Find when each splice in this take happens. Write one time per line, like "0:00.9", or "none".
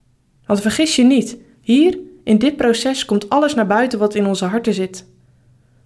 none